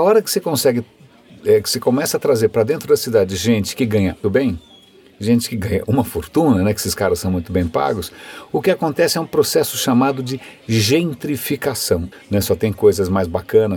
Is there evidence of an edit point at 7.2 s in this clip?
no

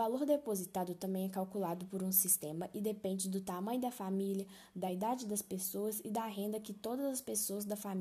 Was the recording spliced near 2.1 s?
no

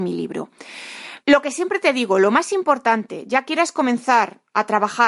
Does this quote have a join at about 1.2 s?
yes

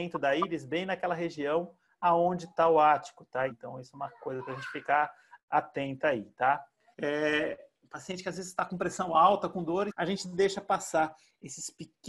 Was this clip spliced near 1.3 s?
no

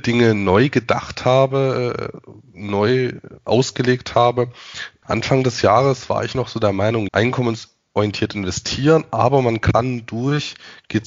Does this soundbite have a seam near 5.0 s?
yes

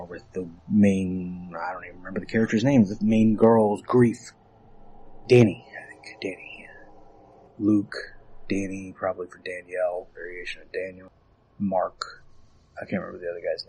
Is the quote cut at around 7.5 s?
yes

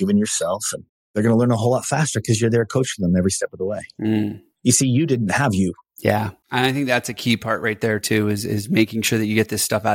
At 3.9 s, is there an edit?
no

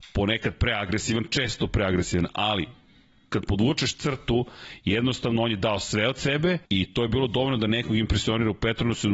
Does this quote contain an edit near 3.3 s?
no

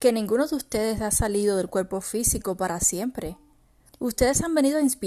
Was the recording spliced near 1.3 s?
no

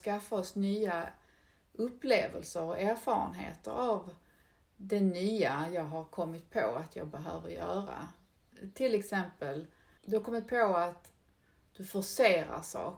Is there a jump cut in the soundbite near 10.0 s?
yes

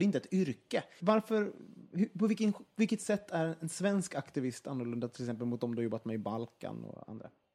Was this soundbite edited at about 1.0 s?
yes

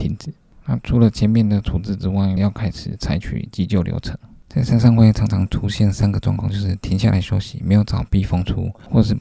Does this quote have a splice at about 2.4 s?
yes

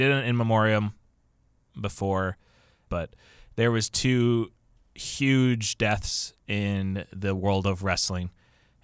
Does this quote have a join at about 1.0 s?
no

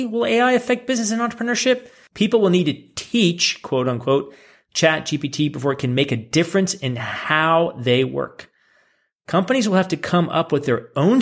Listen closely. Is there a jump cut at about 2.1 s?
yes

